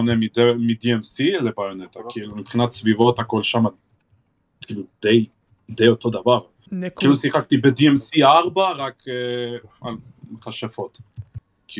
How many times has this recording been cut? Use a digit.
0